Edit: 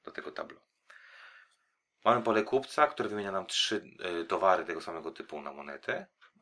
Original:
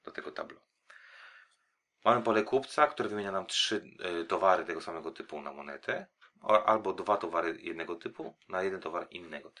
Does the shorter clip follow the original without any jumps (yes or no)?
yes